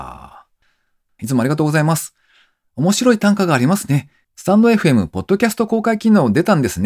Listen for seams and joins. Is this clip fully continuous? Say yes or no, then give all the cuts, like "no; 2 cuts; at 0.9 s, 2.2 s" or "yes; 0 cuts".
no; 2 cuts; at 1.2 s, 4.2 s